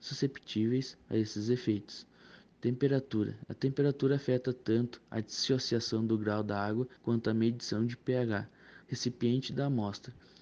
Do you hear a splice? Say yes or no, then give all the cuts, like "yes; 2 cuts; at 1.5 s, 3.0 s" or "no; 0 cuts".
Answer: yes; 3 cuts; at 2.5 s, 7.0 s, 8.8 s